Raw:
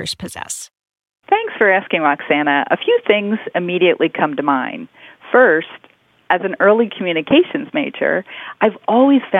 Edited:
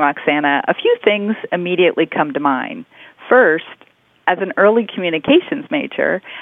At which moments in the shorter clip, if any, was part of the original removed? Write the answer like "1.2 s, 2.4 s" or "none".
none